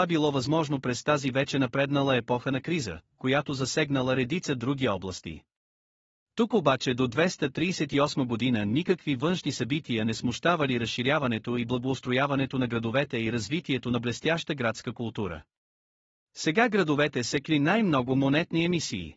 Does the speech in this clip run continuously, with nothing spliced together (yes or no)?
yes